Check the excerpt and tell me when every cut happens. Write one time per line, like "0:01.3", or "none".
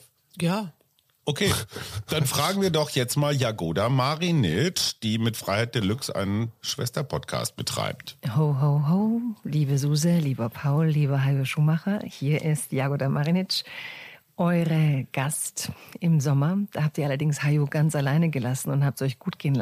none

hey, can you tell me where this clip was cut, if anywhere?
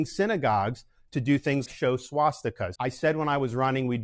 0:01.7
0:02.8

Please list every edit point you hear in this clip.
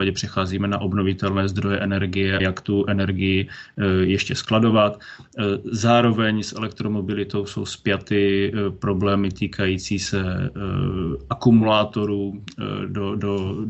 0:02.4

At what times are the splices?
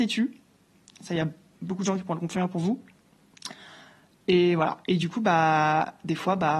none

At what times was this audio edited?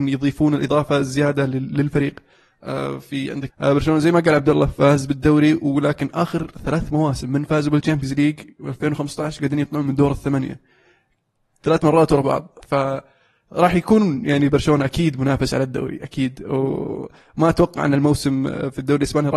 0:03.5

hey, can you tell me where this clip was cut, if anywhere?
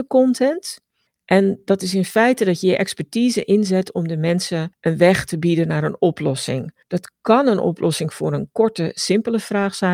none

